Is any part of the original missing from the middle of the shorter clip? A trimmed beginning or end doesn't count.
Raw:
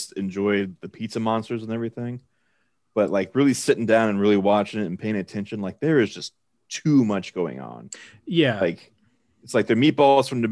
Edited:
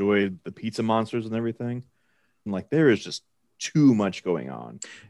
yes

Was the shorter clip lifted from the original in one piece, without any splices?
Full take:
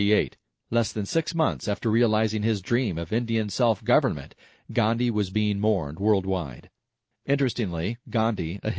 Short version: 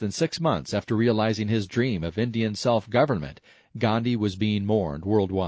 yes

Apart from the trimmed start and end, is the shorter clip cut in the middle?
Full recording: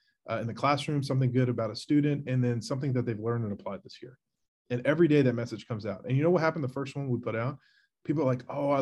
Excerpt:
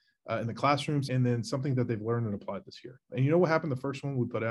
yes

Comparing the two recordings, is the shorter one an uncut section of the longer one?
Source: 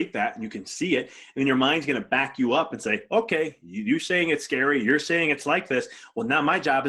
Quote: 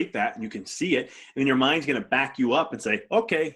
yes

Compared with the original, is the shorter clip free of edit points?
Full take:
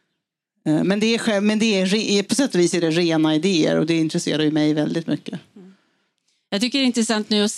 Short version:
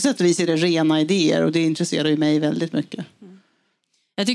yes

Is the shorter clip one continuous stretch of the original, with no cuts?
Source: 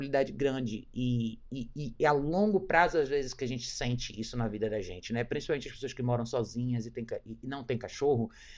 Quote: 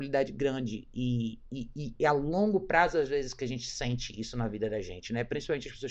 yes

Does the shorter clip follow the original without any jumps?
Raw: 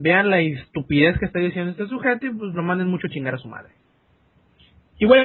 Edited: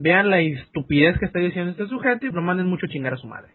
no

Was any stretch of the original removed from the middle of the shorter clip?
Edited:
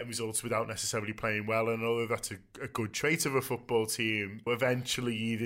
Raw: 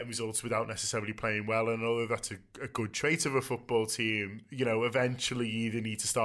yes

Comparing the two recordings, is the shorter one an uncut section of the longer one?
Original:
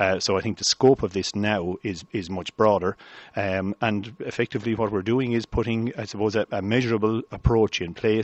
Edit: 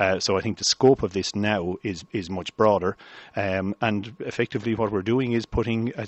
yes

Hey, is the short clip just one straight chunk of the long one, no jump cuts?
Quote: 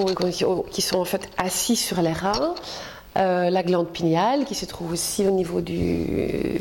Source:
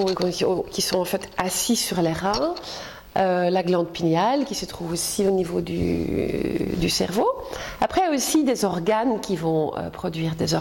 yes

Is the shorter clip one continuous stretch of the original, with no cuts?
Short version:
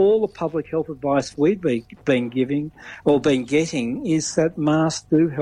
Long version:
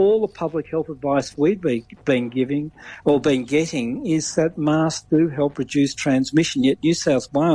yes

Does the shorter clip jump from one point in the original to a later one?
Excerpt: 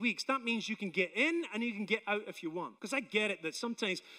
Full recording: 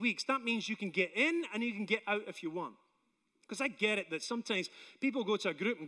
yes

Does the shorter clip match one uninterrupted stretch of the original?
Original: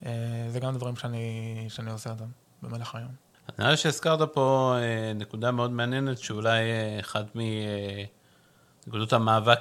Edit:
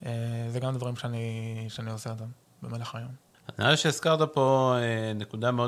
yes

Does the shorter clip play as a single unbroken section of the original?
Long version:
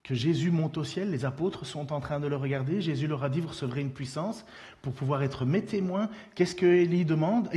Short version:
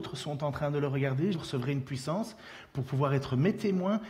no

